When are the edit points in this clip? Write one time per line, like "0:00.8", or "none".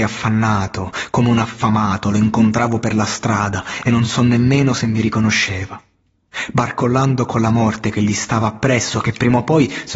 none